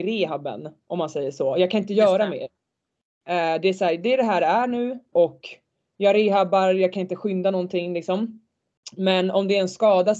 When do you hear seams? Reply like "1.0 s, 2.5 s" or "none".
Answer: 5.1 s

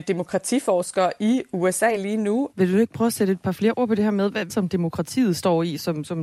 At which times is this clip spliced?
2.5 s, 4.5 s

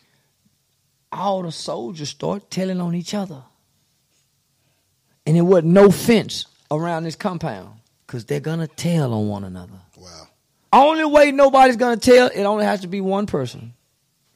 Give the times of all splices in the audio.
8.0 s, 10.7 s

